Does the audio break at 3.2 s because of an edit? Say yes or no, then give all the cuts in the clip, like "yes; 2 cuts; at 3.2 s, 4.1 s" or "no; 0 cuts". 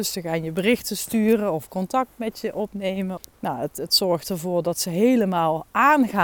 yes; 1 cut; at 3.2 s